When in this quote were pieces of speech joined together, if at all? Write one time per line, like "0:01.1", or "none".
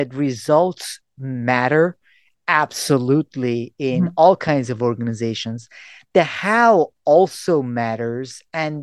none